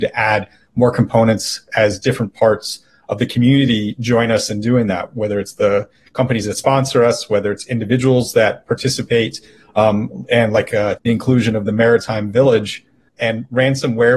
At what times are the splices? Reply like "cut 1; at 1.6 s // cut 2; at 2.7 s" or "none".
cut 1; at 11.0 s // cut 2; at 13.1 s